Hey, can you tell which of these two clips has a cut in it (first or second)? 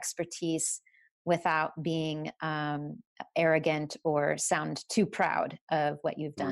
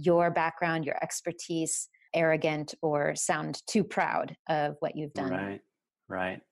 second